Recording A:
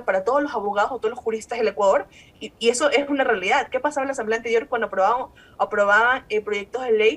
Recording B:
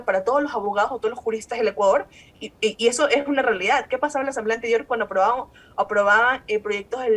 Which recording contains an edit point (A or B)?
A